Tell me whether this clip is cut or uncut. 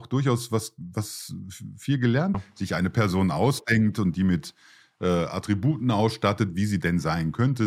cut